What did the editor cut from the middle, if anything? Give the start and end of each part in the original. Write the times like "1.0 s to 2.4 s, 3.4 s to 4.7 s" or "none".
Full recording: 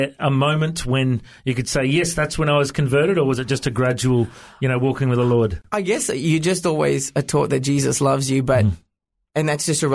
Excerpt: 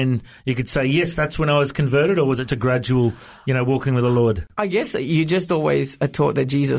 3.5 s to 3.6 s